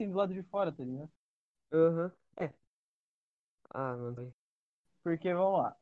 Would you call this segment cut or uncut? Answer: cut